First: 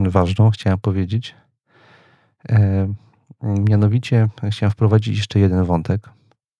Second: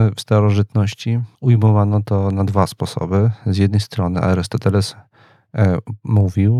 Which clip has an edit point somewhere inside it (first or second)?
second